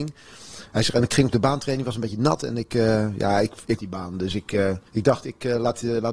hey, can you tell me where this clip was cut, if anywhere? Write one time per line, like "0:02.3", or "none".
0:03.8
0:04.9